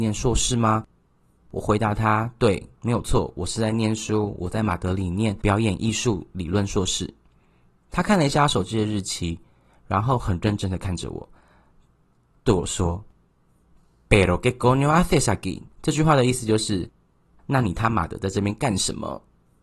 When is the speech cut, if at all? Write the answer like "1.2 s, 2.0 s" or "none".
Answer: 15.7 s